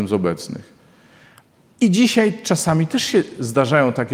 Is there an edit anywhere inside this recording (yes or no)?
no